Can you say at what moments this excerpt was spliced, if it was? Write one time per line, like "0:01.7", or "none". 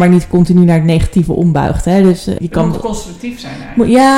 0:02.4